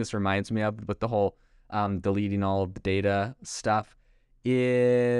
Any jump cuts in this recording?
no; 0 cuts

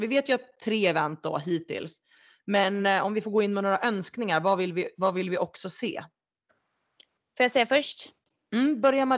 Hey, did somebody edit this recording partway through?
no; 0 cuts

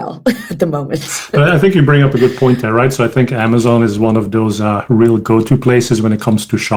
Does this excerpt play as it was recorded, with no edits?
yes; 0 cuts

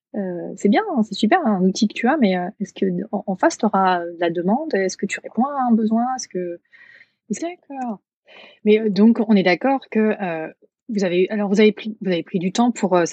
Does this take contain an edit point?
yes; 1 cut; at 7.4 s

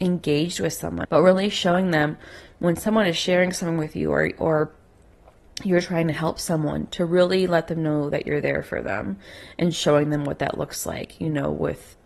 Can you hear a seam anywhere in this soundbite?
yes; 1 cut; at 1.0 s

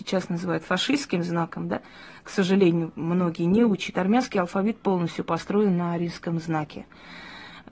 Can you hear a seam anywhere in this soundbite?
yes; 1 cut; at 3.9 s

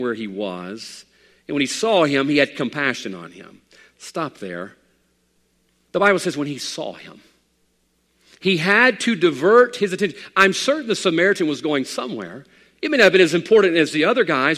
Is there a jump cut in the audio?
no; 0 cuts

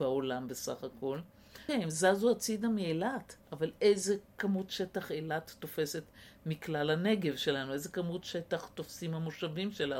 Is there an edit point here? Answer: yes; 2 cuts; at 1.7 s, 3.4 s

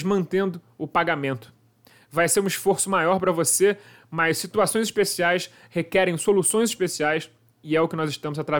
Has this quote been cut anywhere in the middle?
no; 0 cuts

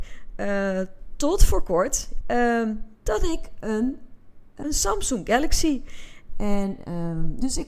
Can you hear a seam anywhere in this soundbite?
yes; 3 cuts; at 2.2 s, 4.6 s, 6.3 s

